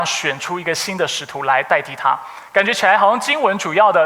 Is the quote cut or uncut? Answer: uncut